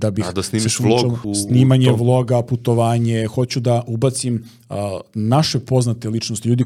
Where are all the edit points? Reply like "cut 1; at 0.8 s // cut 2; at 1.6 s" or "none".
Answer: cut 1; at 1.2 s